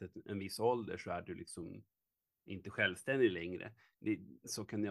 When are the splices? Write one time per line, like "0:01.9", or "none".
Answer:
none